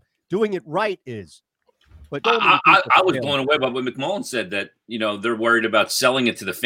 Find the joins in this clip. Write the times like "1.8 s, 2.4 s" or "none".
2.2 s